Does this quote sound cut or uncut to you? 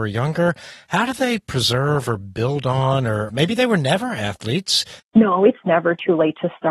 cut